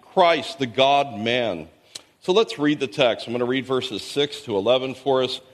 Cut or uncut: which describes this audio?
uncut